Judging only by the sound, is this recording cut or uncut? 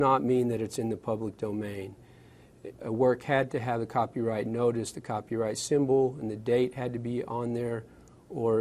cut